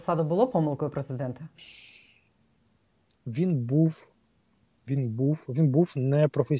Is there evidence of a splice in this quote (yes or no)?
no